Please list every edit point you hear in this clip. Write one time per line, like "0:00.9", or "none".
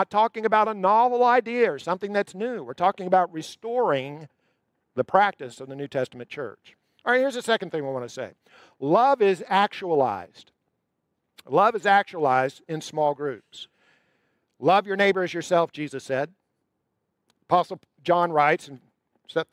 none